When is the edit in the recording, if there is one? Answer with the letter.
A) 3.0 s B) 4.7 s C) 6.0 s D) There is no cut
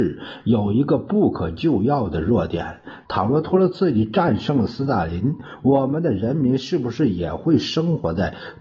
A